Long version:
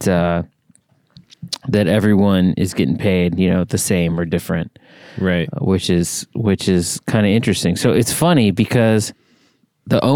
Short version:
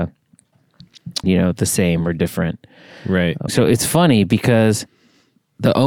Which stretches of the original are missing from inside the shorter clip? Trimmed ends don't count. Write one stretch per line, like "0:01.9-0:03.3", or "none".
0:01.6-0:03.4
0:05.6-0:07.7